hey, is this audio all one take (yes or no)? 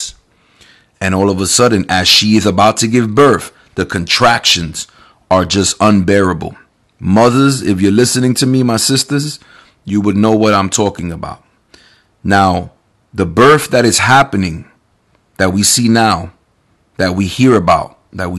yes